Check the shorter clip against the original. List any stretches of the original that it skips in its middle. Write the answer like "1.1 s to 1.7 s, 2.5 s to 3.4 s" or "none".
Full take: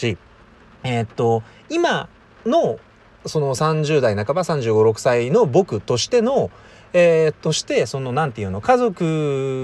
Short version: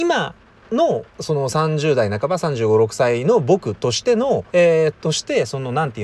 2.8 s to 3.1 s, 6.5 s to 6.9 s